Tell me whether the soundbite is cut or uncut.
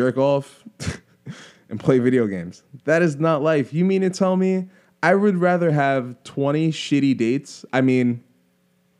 cut